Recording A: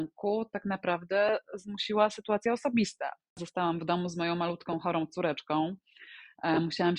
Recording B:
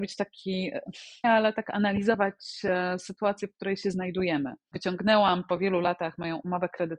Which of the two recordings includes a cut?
B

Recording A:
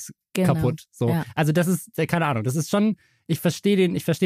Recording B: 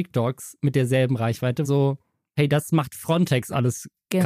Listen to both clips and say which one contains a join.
B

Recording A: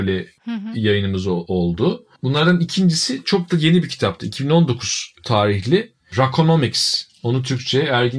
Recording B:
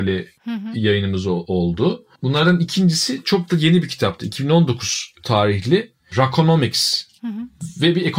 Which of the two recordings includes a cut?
B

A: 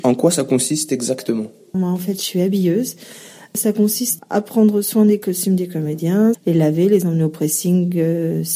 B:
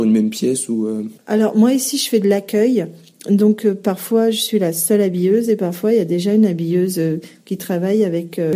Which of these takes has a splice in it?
A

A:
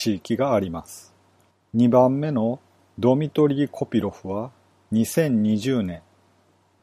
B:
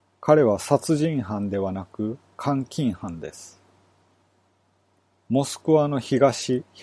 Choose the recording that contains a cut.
A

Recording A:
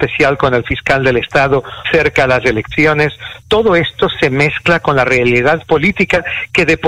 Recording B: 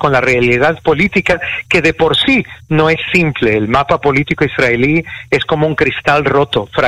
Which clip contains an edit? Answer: A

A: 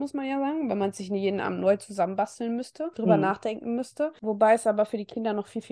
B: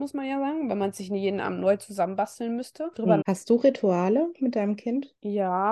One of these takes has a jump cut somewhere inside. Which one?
B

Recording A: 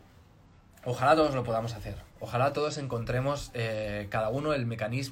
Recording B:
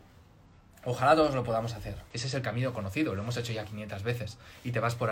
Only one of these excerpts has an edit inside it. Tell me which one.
B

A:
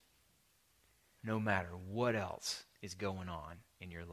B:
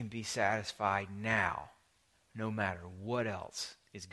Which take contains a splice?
A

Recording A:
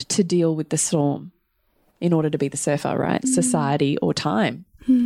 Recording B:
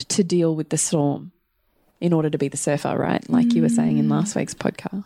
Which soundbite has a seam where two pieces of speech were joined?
A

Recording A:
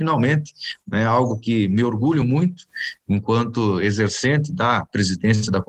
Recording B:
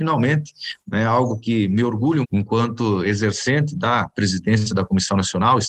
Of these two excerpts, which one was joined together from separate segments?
B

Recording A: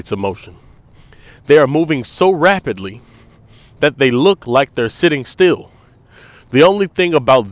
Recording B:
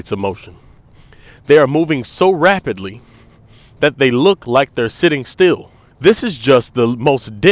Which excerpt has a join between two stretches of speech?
B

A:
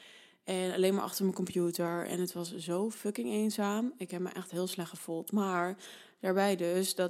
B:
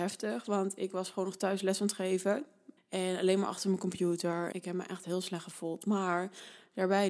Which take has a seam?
B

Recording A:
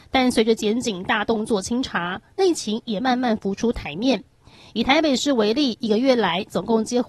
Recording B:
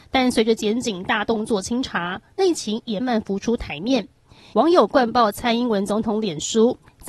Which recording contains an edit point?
B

